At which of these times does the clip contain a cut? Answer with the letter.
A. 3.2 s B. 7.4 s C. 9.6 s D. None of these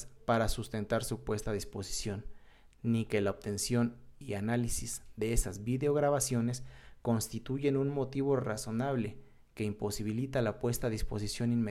D